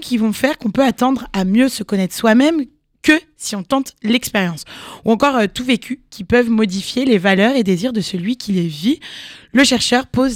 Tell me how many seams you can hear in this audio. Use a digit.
0